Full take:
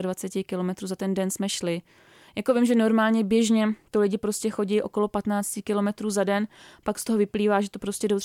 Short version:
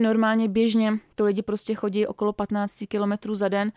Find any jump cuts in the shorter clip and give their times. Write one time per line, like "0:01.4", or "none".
none